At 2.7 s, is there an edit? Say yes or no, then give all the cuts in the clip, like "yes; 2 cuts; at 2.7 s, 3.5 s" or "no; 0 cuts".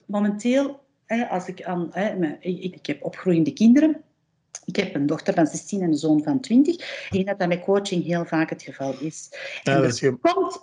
yes; 2 cuts; at 2.7 s, 7.1 s